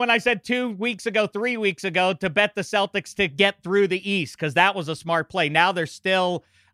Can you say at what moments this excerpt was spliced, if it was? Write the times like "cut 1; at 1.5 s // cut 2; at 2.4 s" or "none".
none